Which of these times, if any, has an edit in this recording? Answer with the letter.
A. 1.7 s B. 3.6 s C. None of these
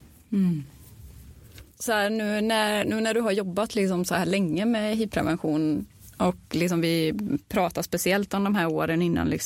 A